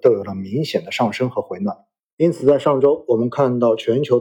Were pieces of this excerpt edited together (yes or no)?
no